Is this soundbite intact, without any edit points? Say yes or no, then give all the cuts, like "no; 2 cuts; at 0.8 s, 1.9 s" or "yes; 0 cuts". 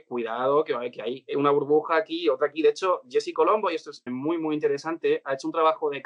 no; 1 cut; at 4.1 s